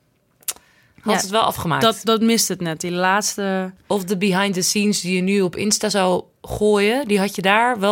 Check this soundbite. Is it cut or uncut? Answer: uncut